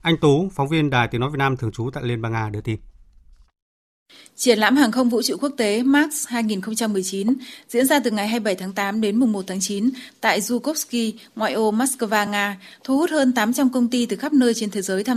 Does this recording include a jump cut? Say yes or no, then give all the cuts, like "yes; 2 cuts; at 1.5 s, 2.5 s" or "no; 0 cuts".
no; 0 cuts